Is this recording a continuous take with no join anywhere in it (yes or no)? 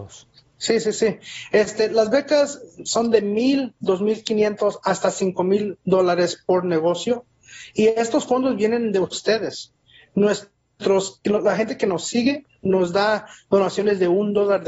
yes